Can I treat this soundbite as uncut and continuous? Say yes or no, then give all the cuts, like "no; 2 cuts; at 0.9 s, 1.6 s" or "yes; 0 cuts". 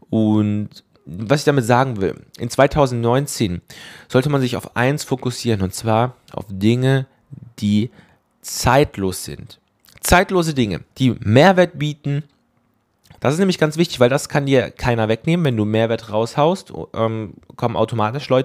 no; 2 cuts; at 10.9 s, 13.2 s